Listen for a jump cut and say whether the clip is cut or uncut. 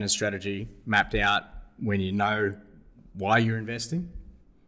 uncut